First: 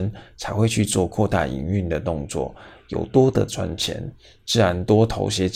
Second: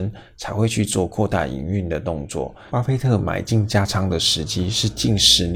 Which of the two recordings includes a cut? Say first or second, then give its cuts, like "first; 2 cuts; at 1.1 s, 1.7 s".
second; 1 cut; at 2.7 s